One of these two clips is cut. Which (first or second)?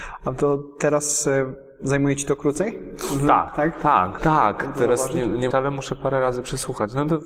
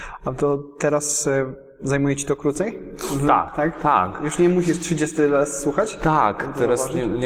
first